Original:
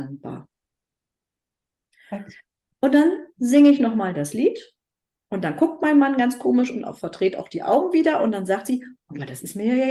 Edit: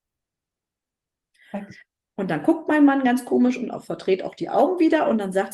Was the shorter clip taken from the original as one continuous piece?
no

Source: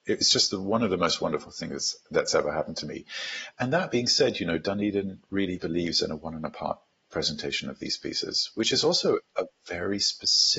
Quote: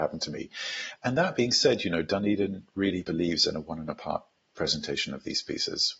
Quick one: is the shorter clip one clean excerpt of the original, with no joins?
yes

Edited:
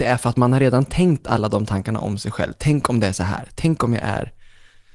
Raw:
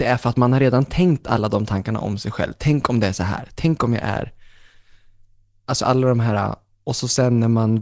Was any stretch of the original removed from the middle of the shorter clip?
no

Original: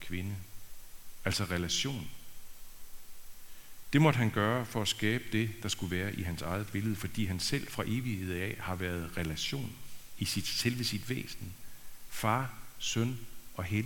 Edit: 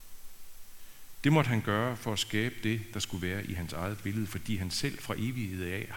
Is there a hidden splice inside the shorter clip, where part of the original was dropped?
no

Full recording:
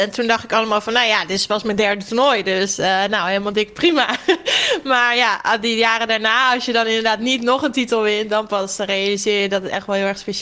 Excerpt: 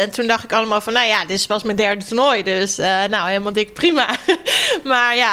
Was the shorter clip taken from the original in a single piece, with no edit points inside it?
yes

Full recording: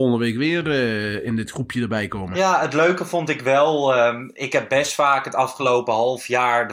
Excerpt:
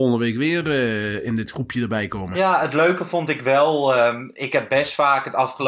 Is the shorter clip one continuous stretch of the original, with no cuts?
yes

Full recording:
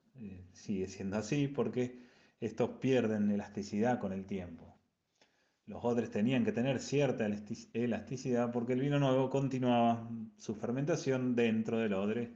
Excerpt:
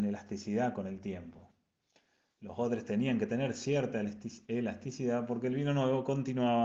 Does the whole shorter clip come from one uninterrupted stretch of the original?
yes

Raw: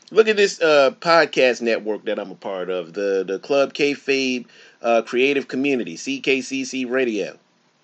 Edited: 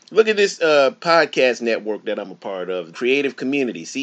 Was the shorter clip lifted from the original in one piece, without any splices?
no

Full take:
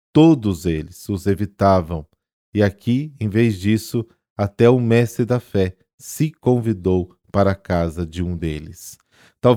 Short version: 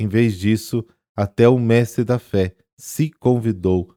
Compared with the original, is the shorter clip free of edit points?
yes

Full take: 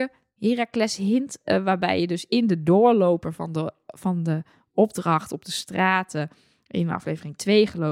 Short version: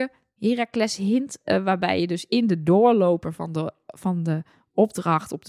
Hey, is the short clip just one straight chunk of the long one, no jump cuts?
yes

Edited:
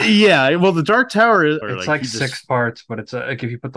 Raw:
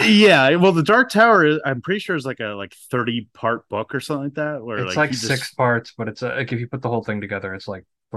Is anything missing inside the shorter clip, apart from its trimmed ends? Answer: yes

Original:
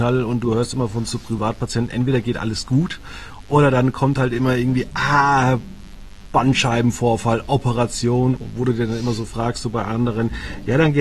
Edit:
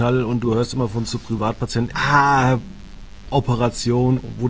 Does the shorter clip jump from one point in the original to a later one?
yes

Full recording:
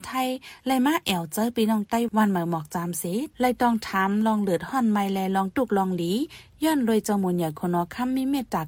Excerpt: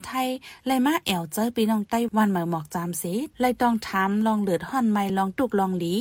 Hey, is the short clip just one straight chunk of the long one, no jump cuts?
no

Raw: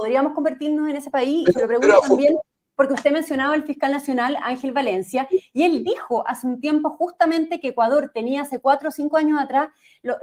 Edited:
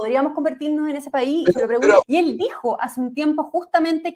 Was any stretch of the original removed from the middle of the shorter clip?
yes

